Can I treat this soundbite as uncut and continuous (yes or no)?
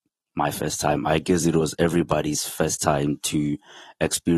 yes